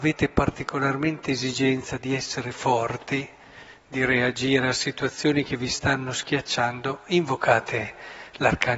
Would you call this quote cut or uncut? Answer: uncut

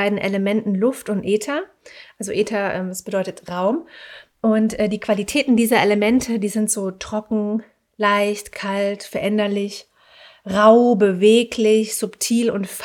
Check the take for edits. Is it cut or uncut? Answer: uncut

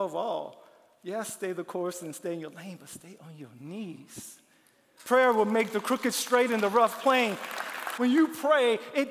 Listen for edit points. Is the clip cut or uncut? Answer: cut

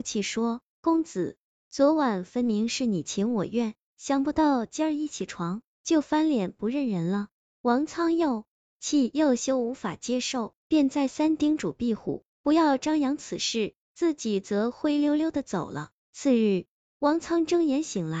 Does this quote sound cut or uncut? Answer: cut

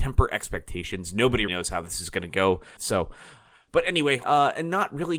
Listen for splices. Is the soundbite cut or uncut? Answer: cut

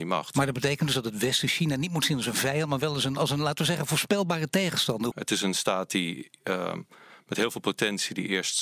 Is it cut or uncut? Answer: cut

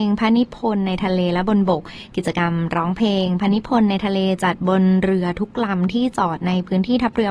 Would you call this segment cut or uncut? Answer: uncut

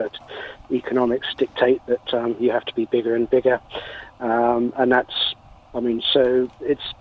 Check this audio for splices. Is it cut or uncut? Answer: uncut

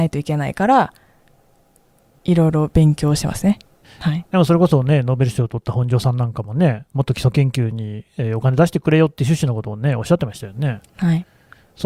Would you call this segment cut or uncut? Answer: cut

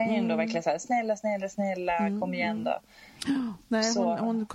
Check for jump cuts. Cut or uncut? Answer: uncut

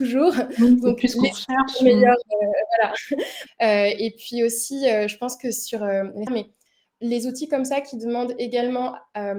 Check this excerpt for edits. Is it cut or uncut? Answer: cut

